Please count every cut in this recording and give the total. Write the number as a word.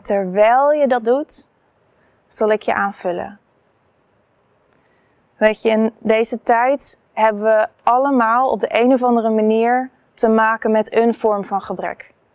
zero